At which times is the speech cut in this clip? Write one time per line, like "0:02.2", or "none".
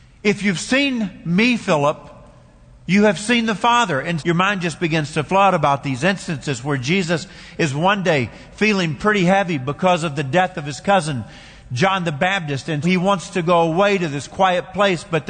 0:04.2
0:12.8